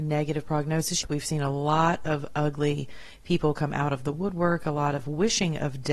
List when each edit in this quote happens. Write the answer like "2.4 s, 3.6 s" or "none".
1.0 s